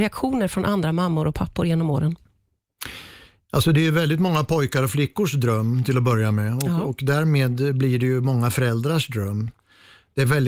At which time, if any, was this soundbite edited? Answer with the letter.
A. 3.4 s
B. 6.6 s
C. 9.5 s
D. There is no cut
D